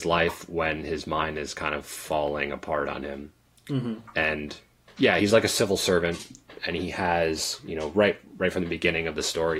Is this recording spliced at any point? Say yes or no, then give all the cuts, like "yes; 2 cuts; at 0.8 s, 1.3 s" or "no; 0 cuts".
yes; 1 cut; at 5.2 s